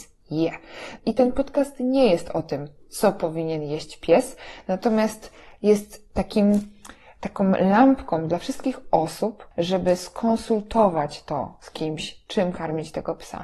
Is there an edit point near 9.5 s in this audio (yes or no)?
yes